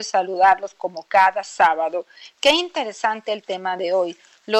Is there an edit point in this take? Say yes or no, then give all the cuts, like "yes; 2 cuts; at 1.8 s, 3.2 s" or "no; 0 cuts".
no; 0 cuts